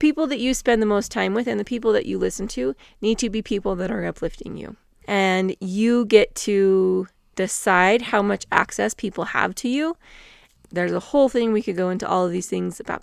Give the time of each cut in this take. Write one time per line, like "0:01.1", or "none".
0:10.5